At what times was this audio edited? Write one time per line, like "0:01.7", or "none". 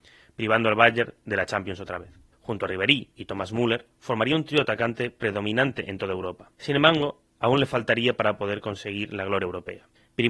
0:02.3
0:06.5